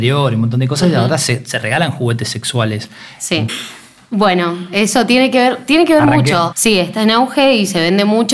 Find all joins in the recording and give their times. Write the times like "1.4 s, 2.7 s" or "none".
3.5 s, 6.5 s